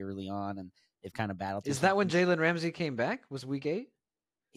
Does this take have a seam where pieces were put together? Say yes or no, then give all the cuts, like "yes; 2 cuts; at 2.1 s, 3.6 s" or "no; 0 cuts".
no; 0 cuts